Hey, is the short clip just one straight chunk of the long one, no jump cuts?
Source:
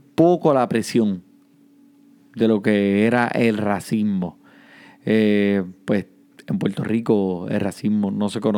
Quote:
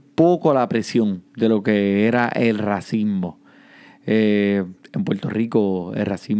no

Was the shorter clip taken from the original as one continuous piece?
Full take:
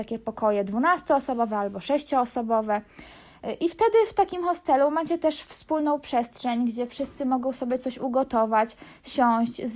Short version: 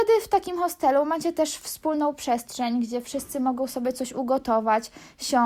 yes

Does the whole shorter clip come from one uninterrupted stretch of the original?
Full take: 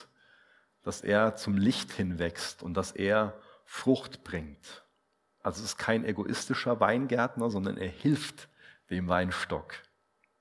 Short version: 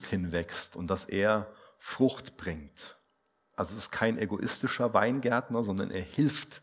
yes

